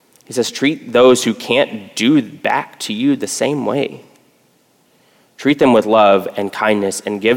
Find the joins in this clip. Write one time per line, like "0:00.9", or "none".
none